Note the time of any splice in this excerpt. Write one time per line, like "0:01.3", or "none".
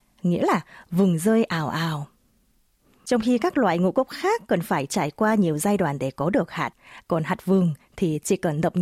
none